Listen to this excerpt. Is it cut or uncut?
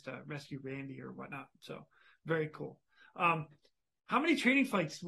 uncut